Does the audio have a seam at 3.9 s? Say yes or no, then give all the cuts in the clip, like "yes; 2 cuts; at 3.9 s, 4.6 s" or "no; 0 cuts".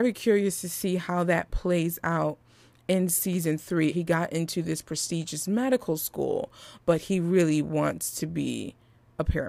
yes; 1 cut; at 3.9 s